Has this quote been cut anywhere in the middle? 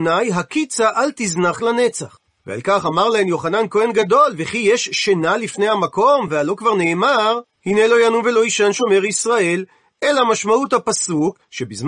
no; 0 cuts

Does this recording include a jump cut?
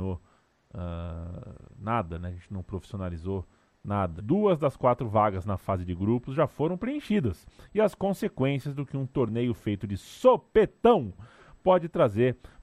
yes; 1 cut; at 4.2 s

